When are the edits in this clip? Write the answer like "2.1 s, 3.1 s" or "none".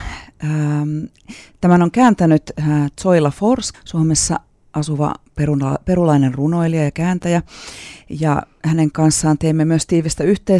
3.7 s